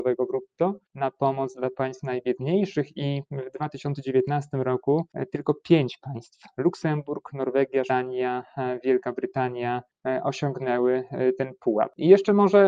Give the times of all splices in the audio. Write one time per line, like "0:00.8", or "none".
0:07.9

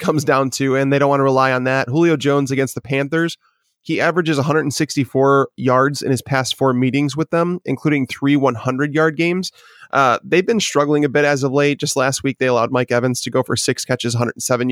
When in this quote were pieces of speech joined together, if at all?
none

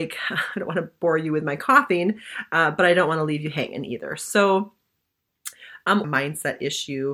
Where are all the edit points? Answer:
0:06.0

